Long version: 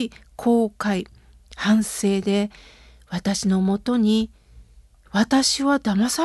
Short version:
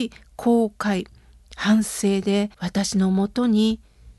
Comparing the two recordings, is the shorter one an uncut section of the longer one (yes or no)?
no